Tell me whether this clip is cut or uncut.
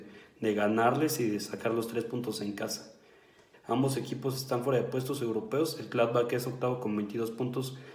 cut